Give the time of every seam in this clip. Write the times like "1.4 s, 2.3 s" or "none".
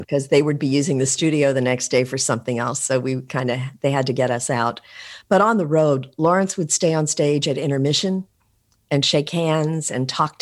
none